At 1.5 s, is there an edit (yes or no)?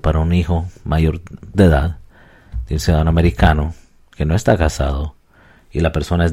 yes